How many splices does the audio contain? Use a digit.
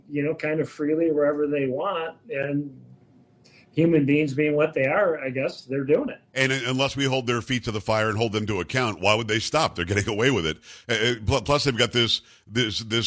1